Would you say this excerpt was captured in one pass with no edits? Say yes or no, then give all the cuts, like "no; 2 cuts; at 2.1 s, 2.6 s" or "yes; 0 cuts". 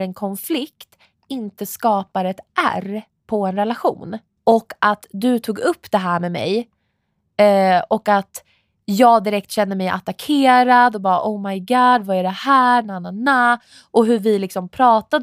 no; 1 cut; at 4.4 s